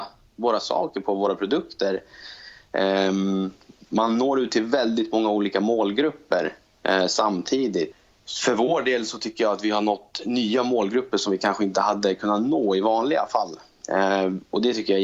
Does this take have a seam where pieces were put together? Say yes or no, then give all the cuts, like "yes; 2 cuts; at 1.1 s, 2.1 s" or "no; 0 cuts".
no; 0 cuts